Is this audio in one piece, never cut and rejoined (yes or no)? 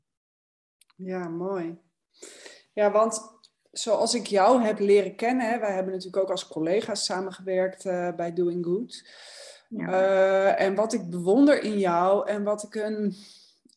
yes